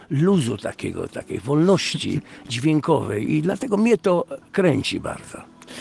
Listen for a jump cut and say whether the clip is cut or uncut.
uncut